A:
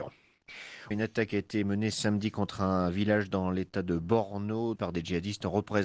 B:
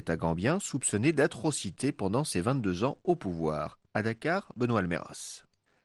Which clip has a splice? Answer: A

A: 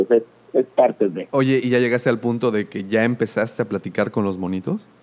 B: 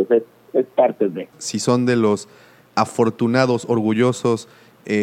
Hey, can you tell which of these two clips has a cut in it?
B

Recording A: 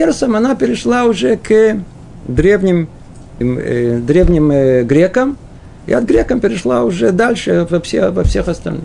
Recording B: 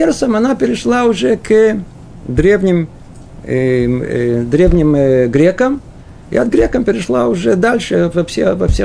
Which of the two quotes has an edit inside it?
A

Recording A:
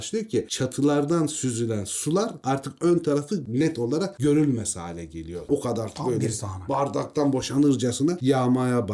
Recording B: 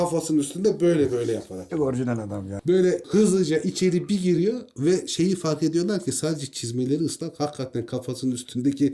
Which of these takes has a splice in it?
B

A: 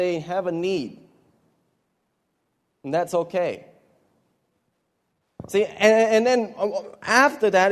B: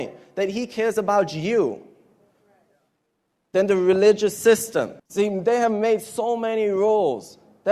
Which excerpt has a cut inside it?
B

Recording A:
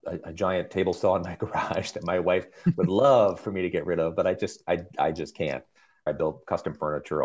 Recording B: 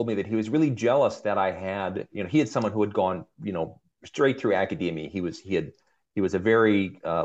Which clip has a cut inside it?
A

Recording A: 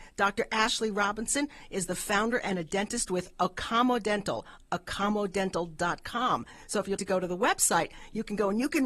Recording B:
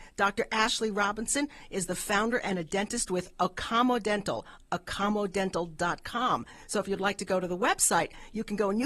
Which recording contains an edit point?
A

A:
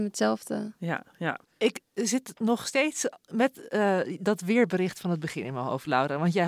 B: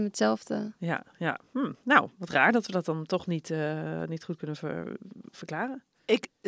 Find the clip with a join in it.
A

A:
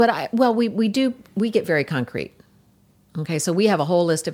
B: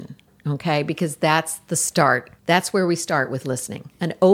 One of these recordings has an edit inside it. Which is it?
B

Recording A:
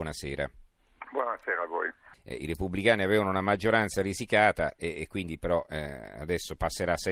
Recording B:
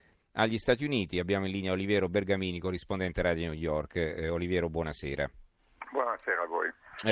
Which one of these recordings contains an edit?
A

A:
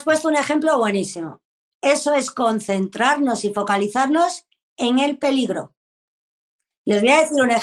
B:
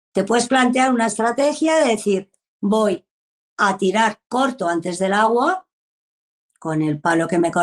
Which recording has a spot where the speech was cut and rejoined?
A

